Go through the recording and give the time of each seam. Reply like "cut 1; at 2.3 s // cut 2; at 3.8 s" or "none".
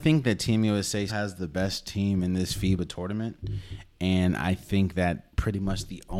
cut 1; at 1.1 s